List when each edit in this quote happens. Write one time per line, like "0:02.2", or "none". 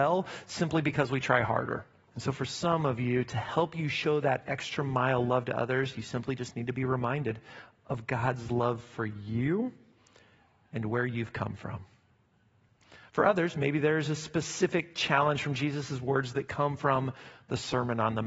0:02.1